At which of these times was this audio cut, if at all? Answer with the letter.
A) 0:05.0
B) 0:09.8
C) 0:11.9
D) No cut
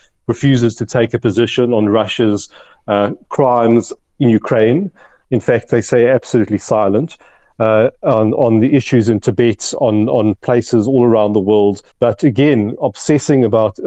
C